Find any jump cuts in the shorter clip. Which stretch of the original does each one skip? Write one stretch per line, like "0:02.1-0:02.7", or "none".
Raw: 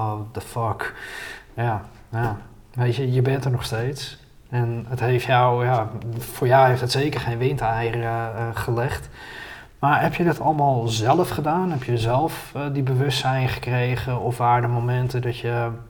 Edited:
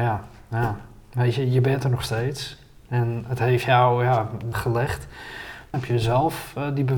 0:06.1-0:08.5
0:09.8-0:11.7